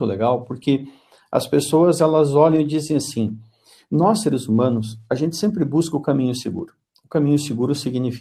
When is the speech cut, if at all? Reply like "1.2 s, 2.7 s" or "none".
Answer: none

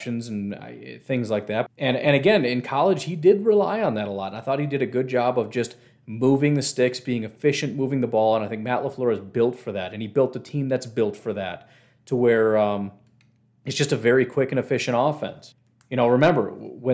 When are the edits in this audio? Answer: 1.7 s

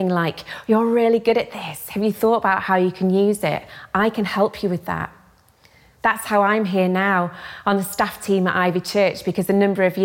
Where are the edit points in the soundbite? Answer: none

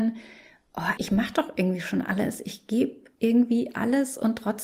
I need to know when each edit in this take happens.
1.0 s

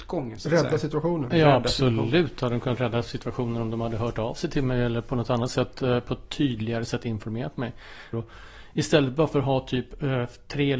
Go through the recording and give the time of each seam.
8.1 s

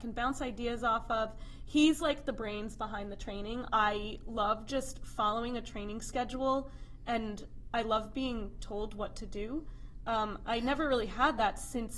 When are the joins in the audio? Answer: none

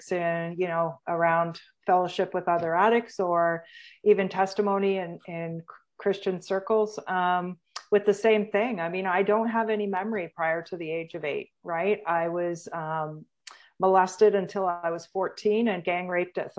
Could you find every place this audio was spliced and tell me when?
none

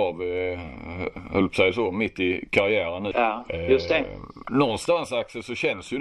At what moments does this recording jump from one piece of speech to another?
3.1 s

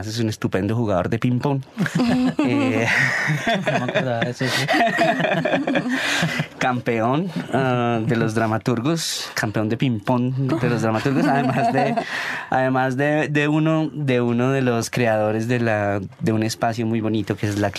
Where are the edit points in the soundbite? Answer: 10.5 s

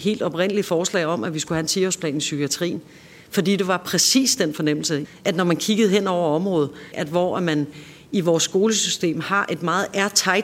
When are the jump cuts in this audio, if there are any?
5.0 s, 6.9 s

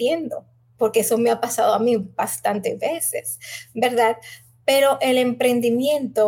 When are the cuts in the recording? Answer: none

